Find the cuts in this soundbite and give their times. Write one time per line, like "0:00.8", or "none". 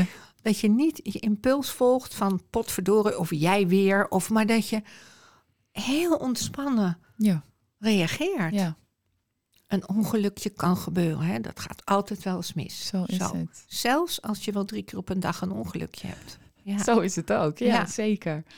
none